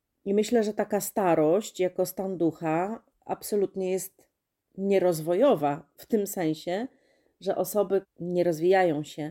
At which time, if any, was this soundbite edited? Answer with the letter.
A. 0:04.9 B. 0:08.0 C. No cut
B